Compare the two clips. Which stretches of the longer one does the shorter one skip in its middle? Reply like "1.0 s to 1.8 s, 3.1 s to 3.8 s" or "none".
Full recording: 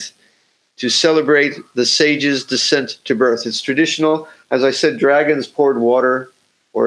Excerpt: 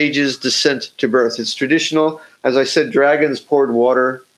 none

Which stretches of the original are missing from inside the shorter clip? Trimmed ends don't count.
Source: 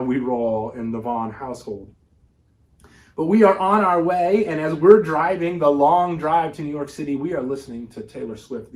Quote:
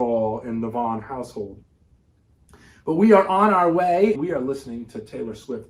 4.5 s to 7.2 s

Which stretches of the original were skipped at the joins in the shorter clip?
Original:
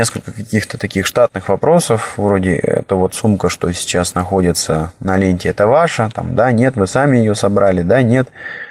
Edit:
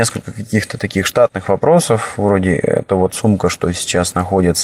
none

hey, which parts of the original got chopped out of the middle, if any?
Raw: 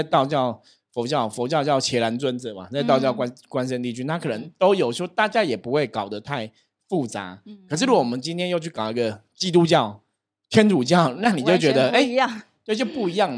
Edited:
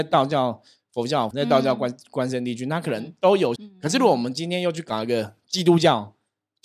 1.3 s to 2.7 s, 4.9 s to 7.4 s

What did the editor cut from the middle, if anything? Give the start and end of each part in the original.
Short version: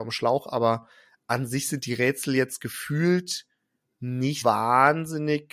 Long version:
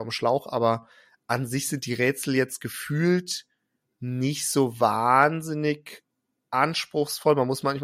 4.4 s to 4.8 s

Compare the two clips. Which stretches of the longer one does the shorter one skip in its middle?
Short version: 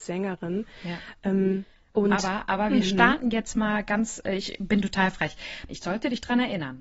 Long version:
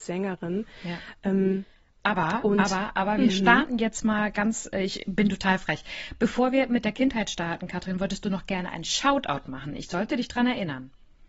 1.9 s to 2.4 s, 6.2 s to 9.8 s

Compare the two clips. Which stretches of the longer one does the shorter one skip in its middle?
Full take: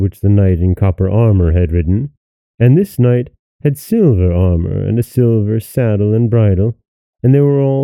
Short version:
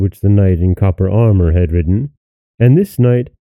none

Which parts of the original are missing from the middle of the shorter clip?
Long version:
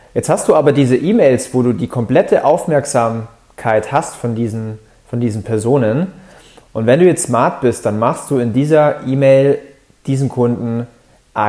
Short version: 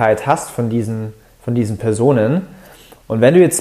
none

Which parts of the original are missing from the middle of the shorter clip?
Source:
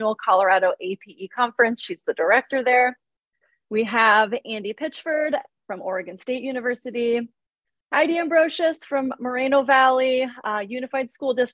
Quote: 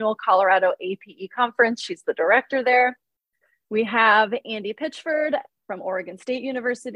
none

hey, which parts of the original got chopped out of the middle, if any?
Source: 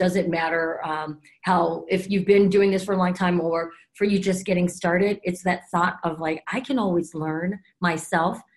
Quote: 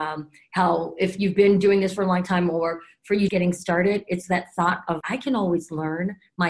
4.2 s to 4.4 s, 6.2 s to 6.4 s

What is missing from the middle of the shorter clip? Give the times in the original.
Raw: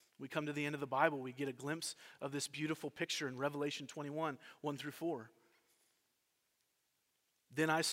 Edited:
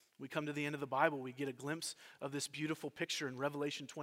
none

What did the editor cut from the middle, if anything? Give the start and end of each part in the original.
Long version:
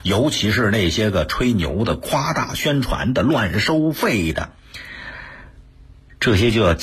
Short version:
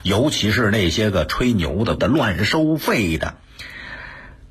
2.0 s to 3.1 s

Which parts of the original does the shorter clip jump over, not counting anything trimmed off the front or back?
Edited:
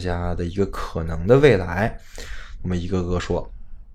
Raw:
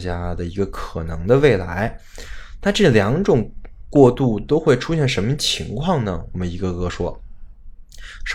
2.6 s to 6.3 s

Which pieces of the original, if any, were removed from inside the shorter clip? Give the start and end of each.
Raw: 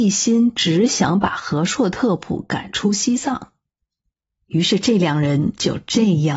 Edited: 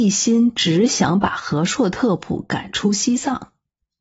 none

